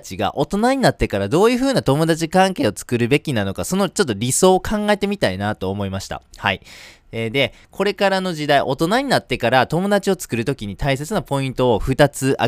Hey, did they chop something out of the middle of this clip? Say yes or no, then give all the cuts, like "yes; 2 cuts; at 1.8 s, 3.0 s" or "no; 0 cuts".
no; 0 cuts